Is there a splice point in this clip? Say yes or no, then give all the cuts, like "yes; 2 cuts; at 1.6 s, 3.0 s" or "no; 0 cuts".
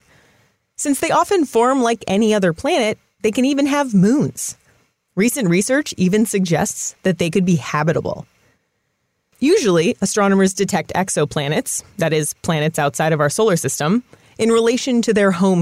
no; 0 cuts